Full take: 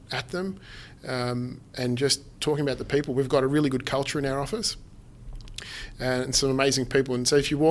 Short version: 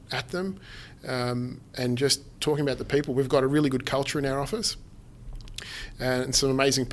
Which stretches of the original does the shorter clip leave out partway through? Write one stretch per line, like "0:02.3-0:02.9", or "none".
none